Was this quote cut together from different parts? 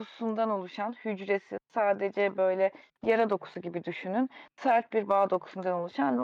no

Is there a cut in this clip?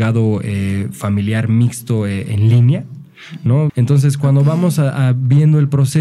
yes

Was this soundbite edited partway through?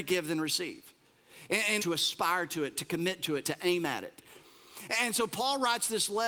yes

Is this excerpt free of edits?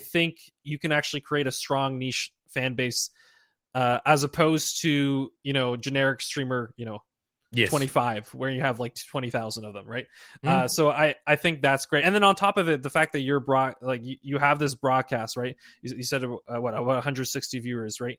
yes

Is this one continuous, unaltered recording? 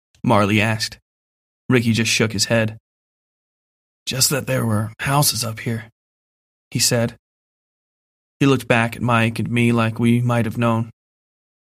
yes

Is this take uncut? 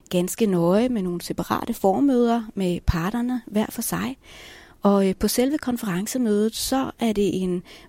yes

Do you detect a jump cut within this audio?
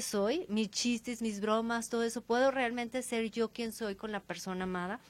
no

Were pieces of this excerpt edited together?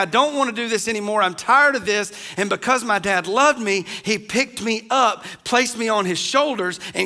no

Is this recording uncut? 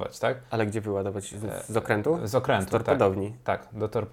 yes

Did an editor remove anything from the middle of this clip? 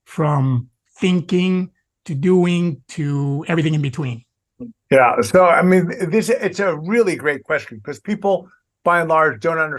no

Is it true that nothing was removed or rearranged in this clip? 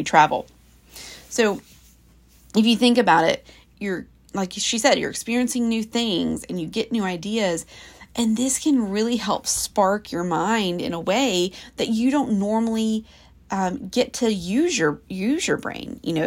no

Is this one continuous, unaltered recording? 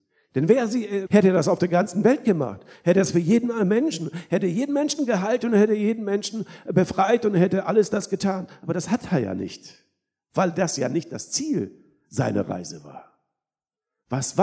no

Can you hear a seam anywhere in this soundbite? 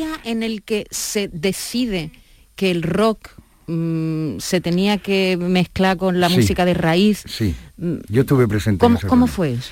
no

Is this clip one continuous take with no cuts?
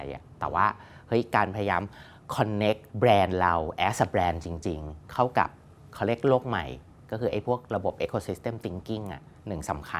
no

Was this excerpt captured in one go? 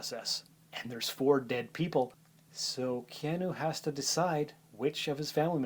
yes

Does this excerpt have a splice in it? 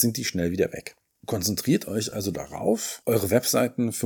no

